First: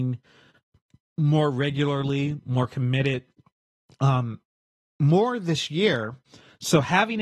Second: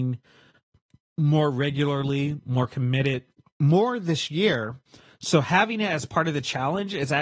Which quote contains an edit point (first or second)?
second